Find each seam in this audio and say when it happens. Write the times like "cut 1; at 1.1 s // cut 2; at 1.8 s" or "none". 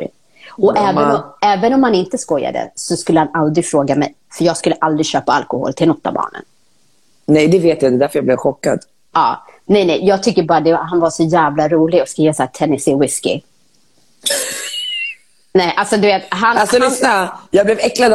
none